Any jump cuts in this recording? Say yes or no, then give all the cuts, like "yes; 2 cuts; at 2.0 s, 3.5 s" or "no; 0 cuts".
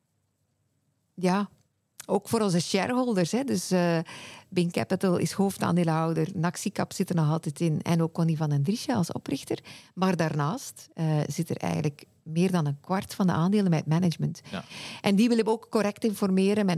no; 0 cuts